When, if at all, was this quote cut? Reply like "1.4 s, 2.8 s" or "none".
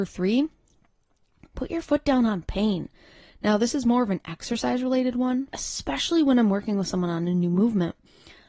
5.5 s